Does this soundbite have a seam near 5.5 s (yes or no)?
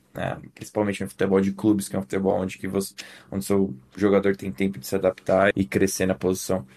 yes